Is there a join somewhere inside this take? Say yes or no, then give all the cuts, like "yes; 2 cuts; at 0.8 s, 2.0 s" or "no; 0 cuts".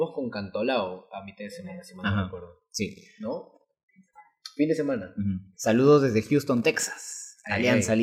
yes; 1 cut; at 5.5 s